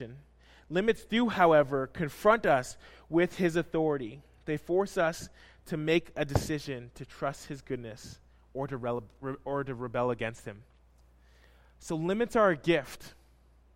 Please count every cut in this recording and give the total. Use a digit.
0